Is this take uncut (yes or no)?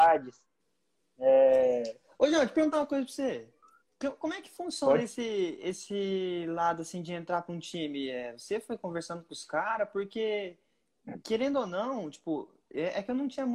yes